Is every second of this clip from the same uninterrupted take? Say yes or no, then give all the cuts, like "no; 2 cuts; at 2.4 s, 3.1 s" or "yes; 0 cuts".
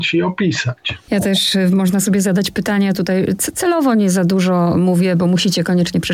yes; 0 cuts